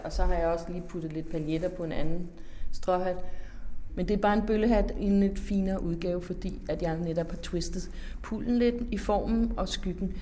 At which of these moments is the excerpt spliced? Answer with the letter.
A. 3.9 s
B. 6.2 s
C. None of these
A